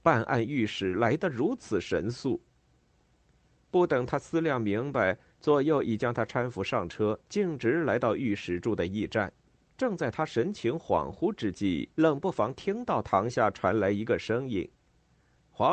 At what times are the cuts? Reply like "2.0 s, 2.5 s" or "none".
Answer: 9.7 s, 11.9 s